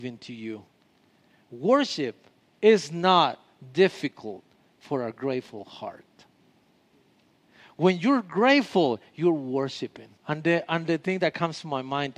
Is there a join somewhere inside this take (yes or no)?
yes